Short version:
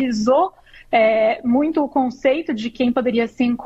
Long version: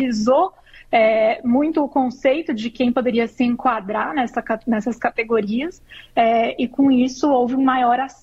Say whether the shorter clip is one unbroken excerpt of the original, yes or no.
yes